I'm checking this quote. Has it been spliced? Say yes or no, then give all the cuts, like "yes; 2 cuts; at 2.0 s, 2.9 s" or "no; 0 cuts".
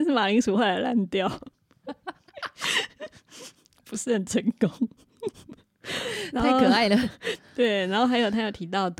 no; 0 cuts